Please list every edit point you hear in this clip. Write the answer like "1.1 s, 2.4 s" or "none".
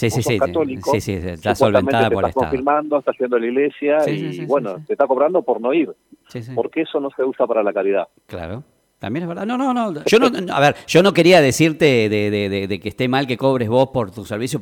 10.0 s